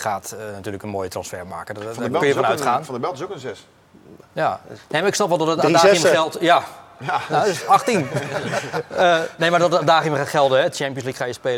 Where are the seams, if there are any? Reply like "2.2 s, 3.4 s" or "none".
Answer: none